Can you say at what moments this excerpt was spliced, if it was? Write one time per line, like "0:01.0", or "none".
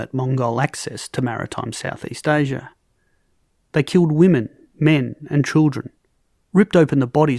0:03.6